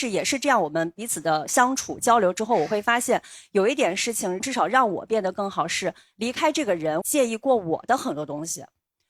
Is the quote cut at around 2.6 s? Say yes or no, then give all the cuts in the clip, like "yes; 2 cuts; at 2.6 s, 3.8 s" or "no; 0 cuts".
no; 1 cut; at 7.0 s